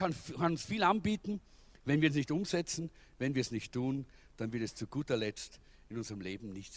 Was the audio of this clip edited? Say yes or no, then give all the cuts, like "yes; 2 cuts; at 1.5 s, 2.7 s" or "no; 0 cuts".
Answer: no; 0 cuts